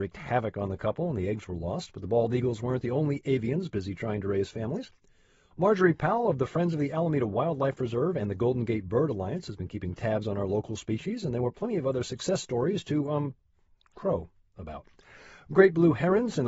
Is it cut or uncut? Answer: uncut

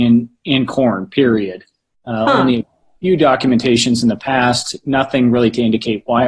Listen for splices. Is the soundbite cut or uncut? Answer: uncut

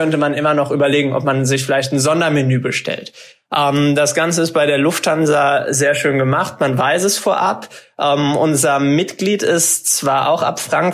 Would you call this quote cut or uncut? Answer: uncut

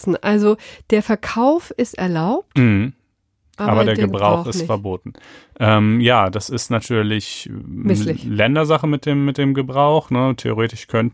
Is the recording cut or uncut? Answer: uncut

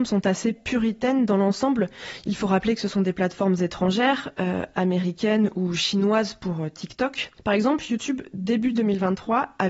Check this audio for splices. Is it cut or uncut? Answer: uncut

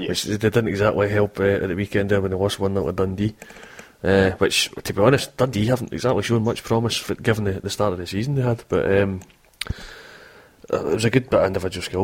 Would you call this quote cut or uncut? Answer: uncut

